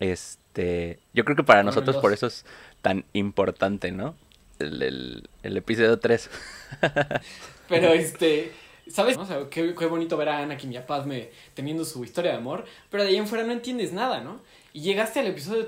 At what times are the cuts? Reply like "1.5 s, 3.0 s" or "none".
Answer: 7.2 s, 9.1 s